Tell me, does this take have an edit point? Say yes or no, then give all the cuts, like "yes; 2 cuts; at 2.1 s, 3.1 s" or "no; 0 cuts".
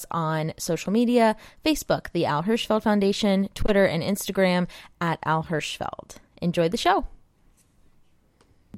no; 0 cuts